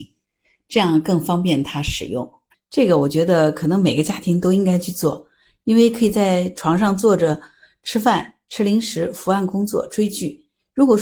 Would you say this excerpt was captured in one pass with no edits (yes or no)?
no